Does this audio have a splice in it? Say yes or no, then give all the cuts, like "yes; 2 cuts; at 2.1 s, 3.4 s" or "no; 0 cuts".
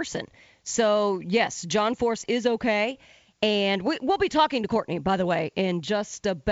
no; 0 cuts